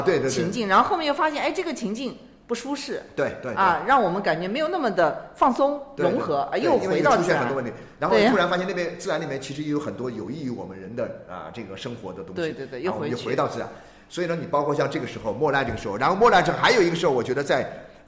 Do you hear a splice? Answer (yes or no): no